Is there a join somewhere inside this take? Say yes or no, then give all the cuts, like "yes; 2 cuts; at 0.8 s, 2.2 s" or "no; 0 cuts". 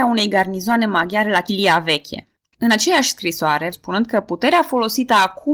yes; 2 cuts; at 2.5 s, 3.7 s